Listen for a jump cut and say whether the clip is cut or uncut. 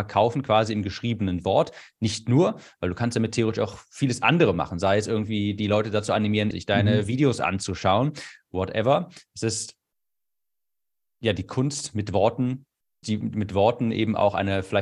cut